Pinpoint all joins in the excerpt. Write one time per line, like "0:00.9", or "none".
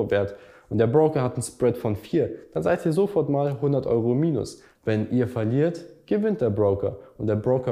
0:04.8

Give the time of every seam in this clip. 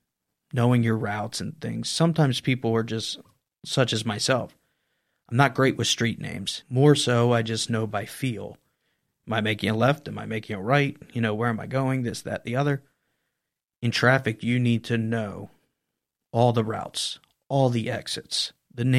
0:06.6

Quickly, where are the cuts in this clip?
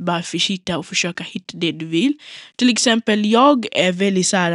none

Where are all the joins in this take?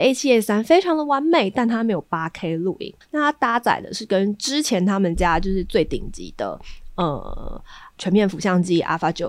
0:03.0

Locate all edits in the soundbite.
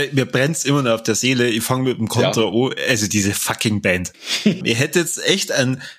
0:04.6

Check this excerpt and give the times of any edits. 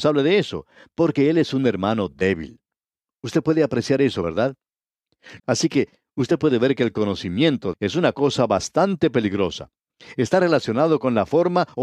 0:05.4
0:07.7

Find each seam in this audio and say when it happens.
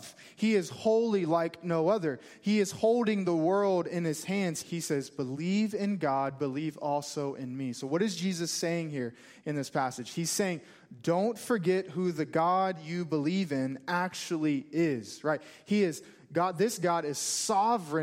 0:04.6

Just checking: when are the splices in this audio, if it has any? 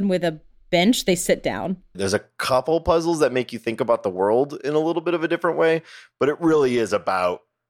0:01.9

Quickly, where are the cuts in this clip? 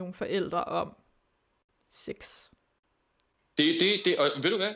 none

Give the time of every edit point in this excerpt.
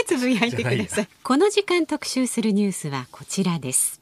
0:01.1

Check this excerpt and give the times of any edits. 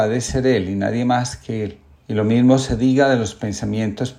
0:02.0

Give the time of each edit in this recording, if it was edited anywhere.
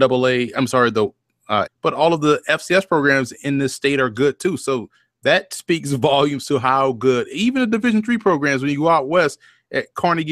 0:01.7

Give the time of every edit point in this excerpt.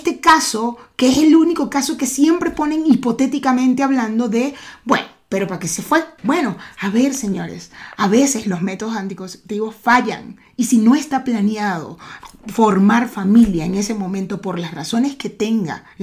0:06.2

